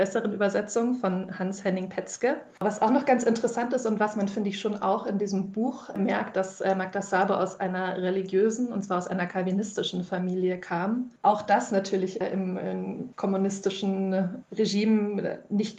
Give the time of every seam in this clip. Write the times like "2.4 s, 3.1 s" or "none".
2.5 s